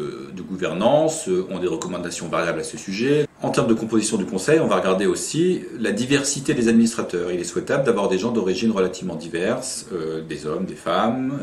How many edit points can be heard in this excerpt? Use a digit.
1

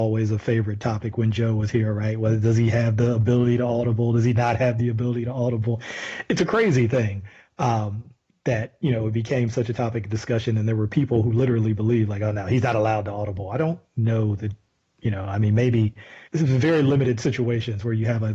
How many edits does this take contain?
1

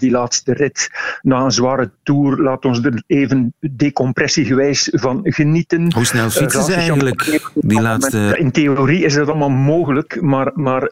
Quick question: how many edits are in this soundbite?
1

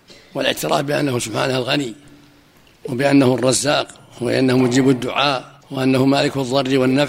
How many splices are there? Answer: 1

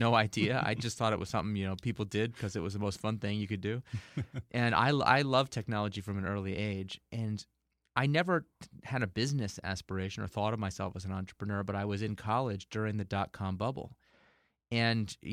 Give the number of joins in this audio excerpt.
0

